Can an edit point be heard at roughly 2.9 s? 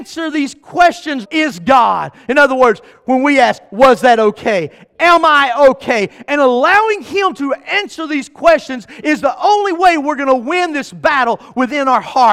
no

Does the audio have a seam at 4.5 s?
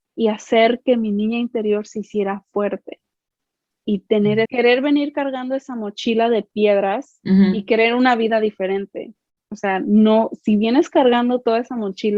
yes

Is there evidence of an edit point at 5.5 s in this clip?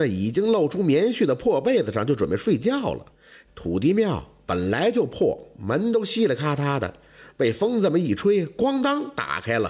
no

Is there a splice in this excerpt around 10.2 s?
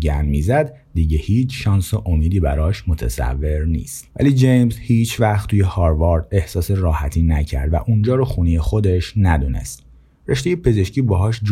no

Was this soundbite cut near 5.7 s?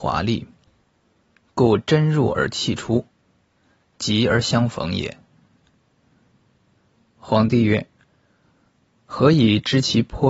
yes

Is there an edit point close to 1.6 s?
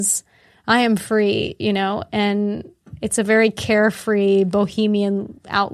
no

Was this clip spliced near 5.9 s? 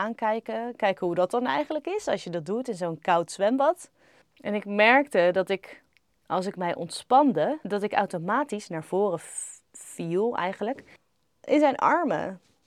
no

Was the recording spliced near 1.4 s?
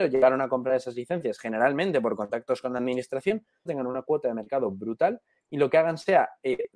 no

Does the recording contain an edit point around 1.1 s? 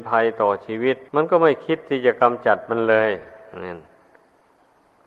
yes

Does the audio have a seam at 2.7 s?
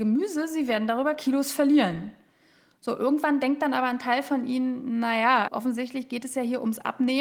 no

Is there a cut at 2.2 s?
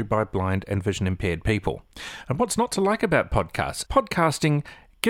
no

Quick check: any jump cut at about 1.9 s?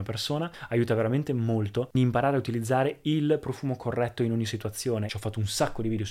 yes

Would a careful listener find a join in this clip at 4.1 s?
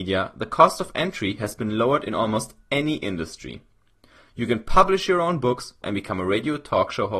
no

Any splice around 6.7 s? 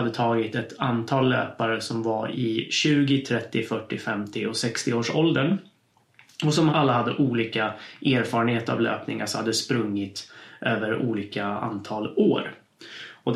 yes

